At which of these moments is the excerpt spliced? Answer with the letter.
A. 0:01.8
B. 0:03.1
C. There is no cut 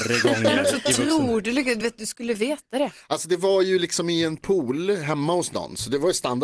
C